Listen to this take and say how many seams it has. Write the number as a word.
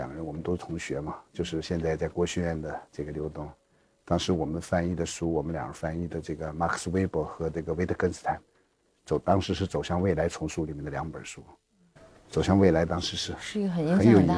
zero